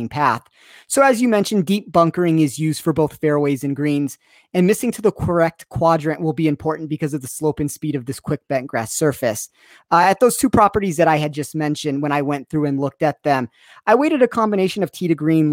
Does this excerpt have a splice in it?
no; 0 cuts

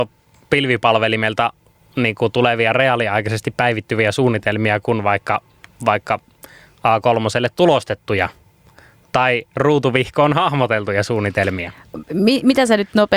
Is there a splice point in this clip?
no; 0 cuts

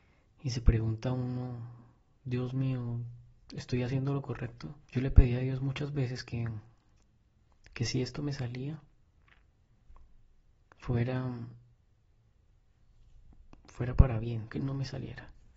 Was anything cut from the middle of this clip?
yes; 2 cuts; at 4.8 s, 14.5 s

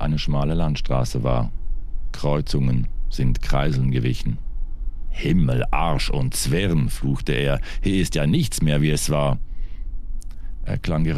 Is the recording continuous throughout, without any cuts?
yes; 0 cuts

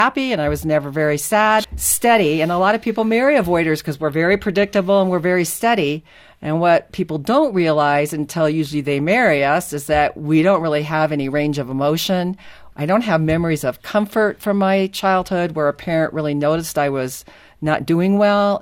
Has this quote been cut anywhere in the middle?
yes; 2 cuts; at 1.6 s, 12.7 s

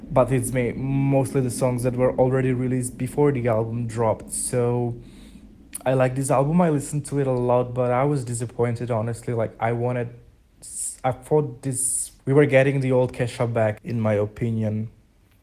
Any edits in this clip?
yes; 2 cuts; at 12.2 s, 13.8 s

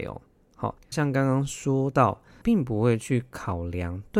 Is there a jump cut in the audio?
yes; 2 cuts; at 0.9 s, 2.4 s

